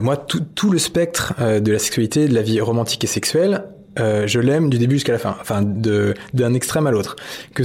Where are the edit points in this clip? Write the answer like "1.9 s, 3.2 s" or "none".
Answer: none